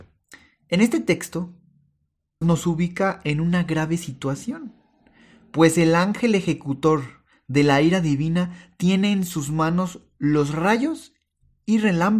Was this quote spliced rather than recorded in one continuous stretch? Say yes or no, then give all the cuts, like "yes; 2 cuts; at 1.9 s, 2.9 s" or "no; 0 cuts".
yes; 1 cut; at 2.4 s